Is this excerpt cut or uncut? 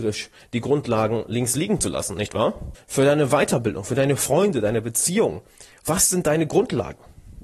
cut